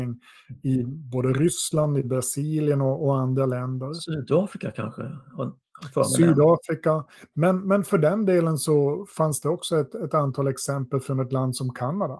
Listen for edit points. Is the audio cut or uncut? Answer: uncut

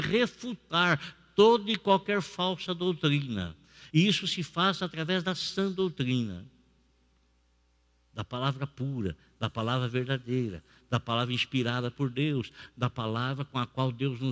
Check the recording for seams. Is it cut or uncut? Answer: uncut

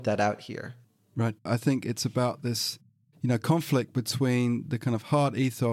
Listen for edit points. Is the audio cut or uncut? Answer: cut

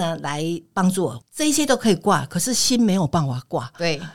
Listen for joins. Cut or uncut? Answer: cut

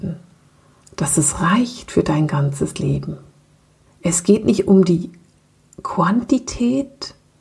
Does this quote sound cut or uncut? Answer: uncut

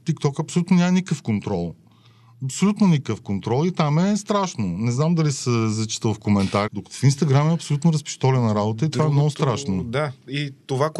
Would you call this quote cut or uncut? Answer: cut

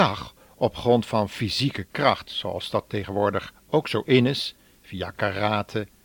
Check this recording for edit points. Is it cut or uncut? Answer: uncut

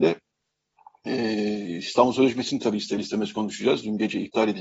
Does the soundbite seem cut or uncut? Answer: uncut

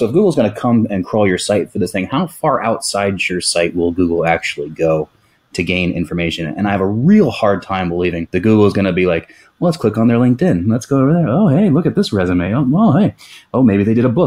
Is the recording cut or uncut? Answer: uncut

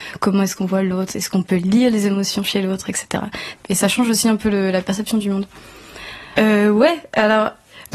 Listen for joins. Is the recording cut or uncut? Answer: cut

